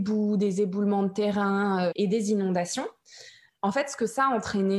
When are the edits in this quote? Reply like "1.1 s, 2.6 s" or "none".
1.9 s, 3.5 s